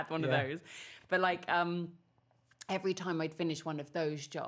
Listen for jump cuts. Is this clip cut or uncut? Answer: uncut